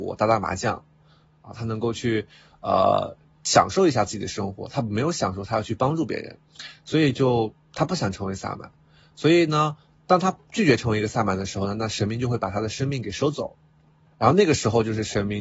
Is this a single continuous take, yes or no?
yes